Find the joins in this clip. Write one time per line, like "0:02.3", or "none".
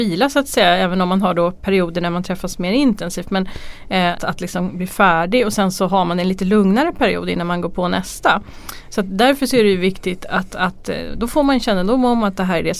0:04.2

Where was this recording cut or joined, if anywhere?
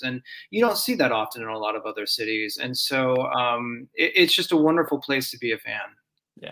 none

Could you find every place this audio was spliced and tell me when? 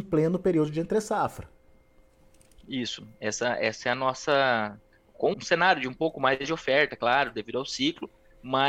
0:05.3

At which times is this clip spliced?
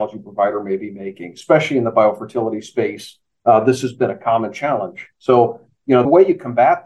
none

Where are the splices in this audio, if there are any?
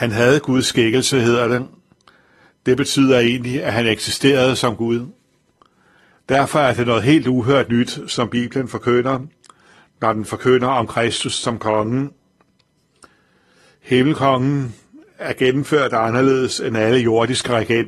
0:06.1

